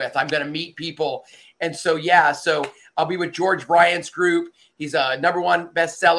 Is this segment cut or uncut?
uncut